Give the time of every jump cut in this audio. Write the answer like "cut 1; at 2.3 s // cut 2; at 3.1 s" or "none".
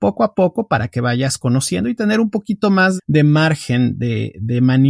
cut 1; at 3.0 s

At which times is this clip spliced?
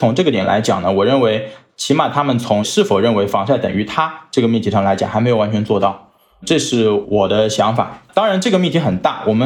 none

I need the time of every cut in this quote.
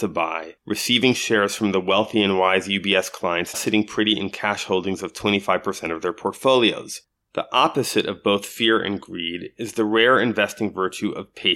cut 1; at 3.5 s

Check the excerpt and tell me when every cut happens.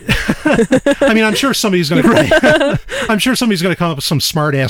cut 1; at 2.0 s

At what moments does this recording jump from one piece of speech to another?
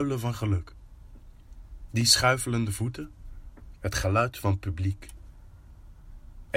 cut 1; at 3.7 s

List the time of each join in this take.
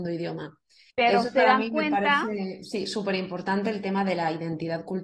cut 1; at 0.9 s

